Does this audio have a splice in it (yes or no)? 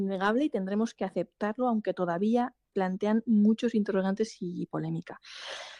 no